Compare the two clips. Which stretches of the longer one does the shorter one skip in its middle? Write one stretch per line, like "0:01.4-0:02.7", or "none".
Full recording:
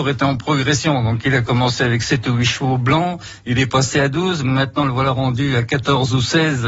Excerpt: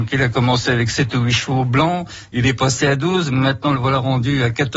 none